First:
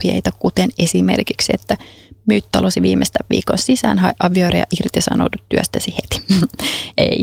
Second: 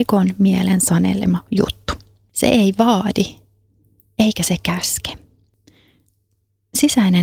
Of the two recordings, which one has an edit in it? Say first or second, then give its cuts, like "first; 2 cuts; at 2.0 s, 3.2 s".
second; 1 cut; at 2.3 s